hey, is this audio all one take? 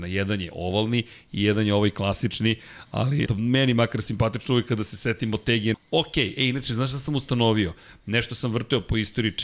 no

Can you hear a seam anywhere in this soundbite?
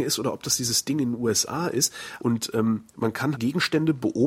yes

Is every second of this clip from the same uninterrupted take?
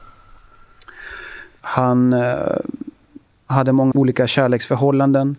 no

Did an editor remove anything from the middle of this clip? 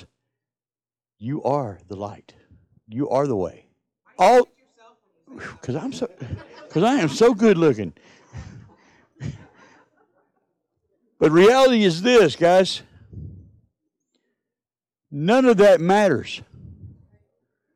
yes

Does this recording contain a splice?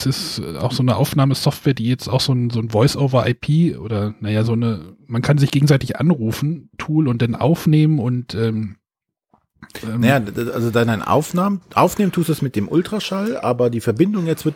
no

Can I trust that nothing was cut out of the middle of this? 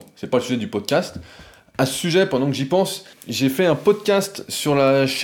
no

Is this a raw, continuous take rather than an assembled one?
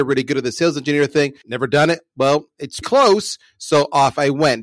no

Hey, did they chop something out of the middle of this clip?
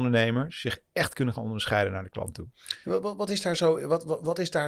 no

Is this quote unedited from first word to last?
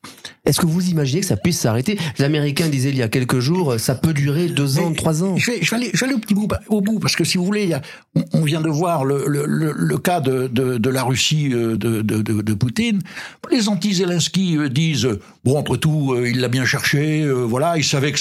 no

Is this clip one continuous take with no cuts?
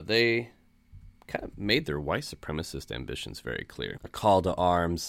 no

